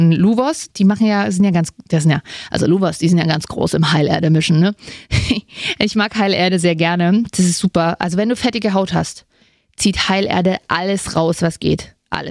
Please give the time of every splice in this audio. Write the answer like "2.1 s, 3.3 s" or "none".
none